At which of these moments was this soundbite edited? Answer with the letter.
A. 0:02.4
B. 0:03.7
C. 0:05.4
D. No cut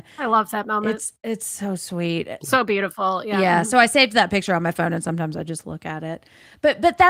D